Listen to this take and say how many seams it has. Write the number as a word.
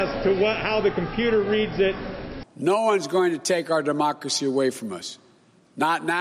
one